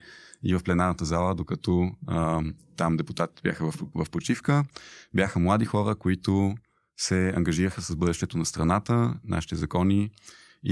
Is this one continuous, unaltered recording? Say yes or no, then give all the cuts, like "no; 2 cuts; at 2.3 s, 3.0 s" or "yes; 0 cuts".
yes; 0 cuts